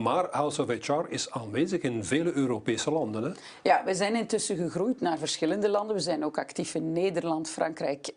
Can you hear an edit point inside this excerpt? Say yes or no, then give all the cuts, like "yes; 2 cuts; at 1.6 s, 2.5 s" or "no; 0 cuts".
no; 0 cuts